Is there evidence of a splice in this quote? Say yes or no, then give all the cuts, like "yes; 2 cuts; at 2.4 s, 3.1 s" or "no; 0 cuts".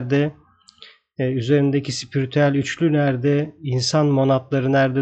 no; 0 cuts